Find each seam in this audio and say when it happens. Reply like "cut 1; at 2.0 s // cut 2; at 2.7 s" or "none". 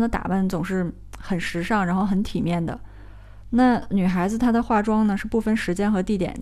cut 1; at 3.4 s